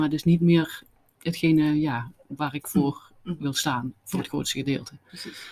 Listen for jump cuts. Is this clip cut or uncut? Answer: uncut